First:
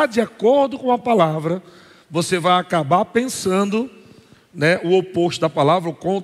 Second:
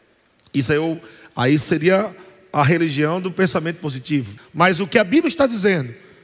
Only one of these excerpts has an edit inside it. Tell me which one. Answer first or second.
second